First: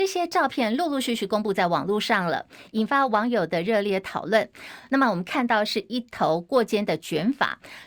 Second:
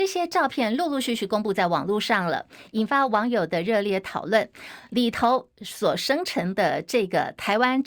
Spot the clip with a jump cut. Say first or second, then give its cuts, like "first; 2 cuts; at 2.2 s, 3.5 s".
first; 1 cut; at 4.9 s